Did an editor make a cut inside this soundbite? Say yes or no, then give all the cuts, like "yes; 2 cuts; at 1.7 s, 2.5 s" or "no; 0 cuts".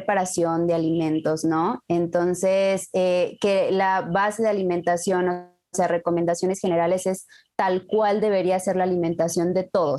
no; 0 cuts